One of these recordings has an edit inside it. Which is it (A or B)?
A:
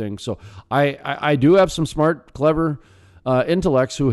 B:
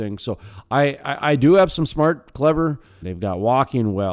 B